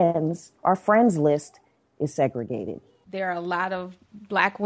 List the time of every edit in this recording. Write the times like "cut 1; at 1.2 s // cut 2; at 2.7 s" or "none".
cut 1; at 3.0 s